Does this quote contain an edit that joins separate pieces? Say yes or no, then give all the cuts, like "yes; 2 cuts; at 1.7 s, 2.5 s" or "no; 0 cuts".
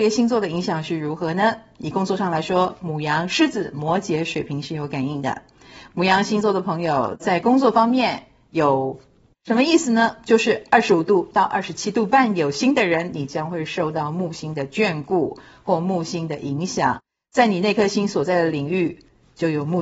yes; 1 cut; at 9.3 s